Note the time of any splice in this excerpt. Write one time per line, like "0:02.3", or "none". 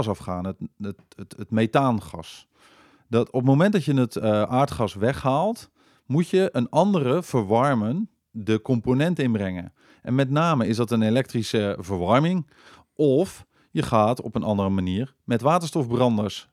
none